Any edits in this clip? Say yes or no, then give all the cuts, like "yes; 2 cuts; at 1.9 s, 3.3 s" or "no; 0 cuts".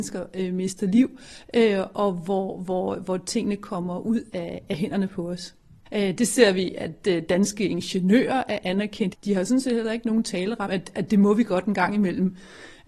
yes; 3 cuts; at 5.9 s, 9.1 s, 10.7 s